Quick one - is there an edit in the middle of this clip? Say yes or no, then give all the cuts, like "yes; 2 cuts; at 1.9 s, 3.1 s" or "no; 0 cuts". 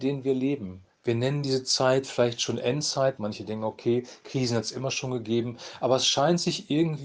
yes; 2 cuts; at 0.9 s, 3.2 s